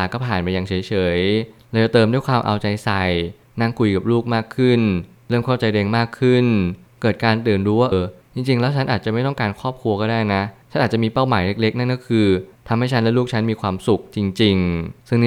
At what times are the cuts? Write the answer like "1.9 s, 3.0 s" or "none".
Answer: 7.9 s